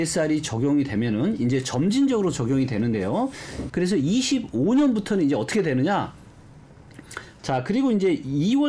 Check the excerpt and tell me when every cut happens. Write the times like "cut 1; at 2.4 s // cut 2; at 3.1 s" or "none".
cut 1; at 3.7 s // cut 2; at 7.4 s